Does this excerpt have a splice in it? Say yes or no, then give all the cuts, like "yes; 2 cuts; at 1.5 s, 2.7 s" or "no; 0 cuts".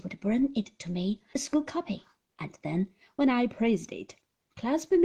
yes; 1 cut; at 1.3 s